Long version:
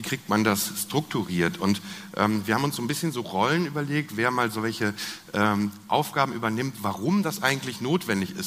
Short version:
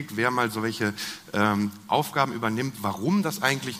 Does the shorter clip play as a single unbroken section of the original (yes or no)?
yes